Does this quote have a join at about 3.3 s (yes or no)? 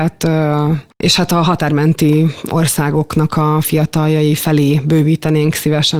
no